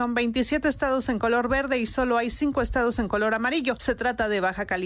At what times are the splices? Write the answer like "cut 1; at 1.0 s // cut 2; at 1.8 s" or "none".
none